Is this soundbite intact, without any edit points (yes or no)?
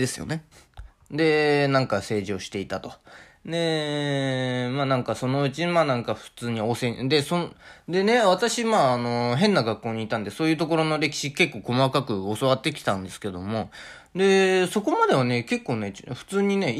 yes